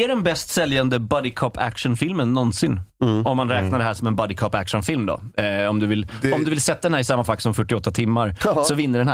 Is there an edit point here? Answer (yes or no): no